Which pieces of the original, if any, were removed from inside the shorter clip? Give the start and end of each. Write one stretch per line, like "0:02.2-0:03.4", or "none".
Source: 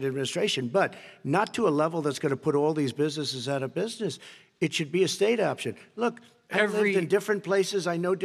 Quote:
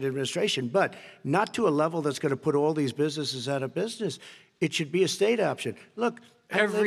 none